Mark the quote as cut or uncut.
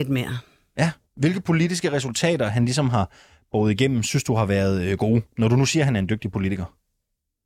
uncut